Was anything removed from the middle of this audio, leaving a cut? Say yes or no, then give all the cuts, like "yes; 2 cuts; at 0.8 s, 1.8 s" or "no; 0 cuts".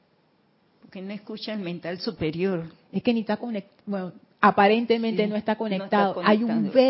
no; 0 cuts